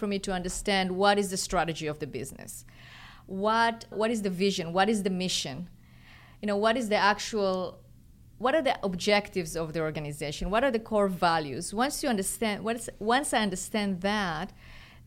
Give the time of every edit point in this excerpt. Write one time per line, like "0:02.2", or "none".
0:03.9